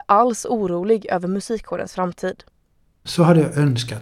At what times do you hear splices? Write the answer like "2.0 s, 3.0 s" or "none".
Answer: 3.1 s